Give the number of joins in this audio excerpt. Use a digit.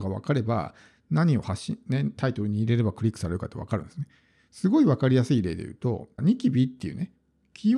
1